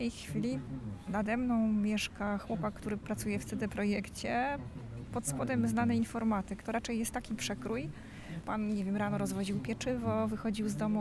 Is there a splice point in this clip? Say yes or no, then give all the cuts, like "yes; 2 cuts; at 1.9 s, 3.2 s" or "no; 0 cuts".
yes; 2 cuts; at 5.1 s, 8.4 s